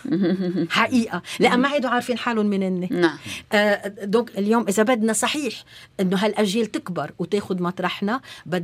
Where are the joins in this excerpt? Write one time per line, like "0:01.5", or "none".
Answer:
0:04.3